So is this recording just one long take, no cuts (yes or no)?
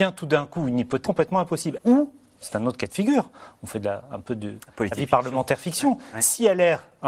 no